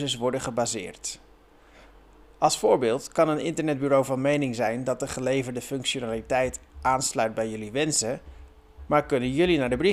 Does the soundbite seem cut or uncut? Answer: uncut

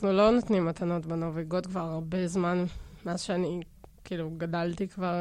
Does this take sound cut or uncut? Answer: uncut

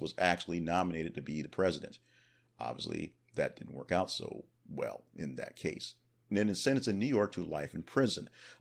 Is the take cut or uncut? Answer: cut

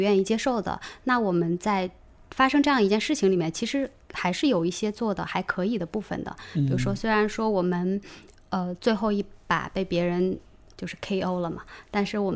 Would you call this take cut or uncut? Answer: cut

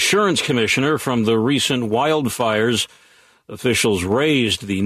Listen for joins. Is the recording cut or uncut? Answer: uncut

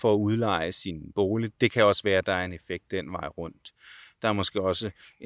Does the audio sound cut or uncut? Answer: uncut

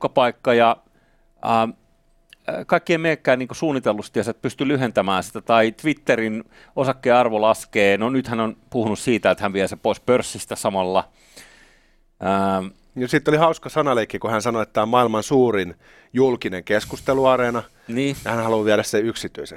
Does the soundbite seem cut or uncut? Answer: uncut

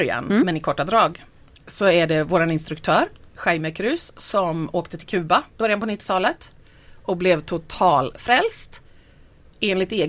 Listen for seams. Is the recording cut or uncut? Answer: uncut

